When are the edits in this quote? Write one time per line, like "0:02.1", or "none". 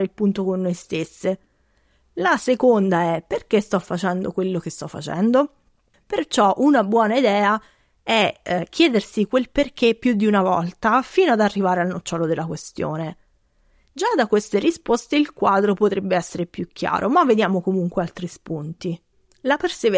0:05.9